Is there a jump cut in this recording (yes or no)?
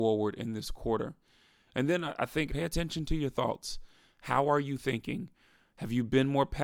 yes